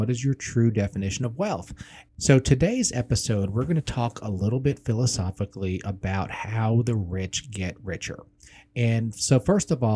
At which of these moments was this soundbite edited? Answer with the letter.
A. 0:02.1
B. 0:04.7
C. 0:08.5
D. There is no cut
A